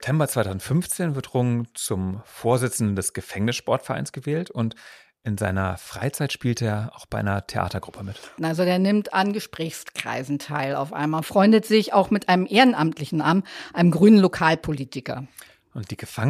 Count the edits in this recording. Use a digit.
1